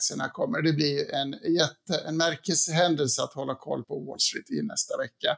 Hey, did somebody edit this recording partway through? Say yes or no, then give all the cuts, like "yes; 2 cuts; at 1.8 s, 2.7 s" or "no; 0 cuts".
yes; 1 cut; at 3.8 s